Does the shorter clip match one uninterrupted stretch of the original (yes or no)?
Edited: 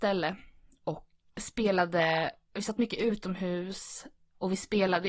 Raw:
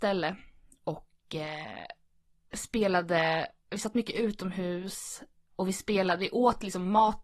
no